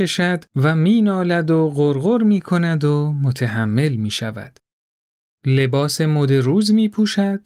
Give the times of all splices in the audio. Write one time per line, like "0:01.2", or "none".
0:05.3